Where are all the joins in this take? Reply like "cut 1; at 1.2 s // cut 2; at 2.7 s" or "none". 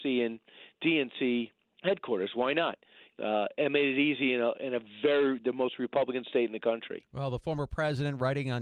cut 1; at 3.1 s